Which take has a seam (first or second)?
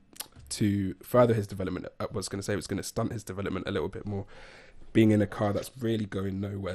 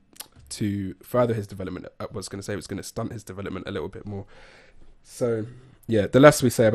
second